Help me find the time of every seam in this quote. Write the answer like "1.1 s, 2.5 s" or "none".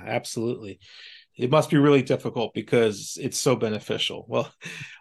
1.3 s